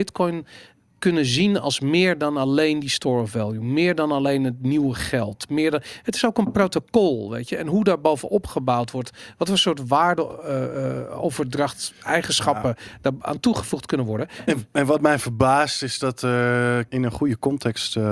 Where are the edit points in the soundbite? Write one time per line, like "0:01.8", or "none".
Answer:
0:14.5
0:16.9